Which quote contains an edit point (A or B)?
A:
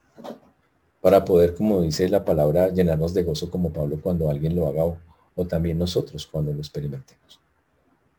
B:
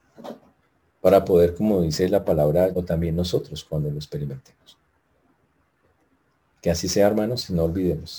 B